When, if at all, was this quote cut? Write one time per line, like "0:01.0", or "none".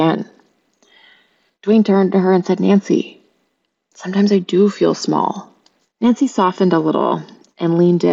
0:05.8